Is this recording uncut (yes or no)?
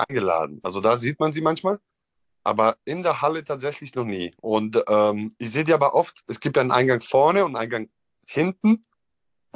no